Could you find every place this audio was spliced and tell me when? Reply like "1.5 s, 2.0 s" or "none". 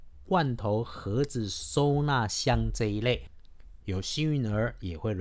3.8 s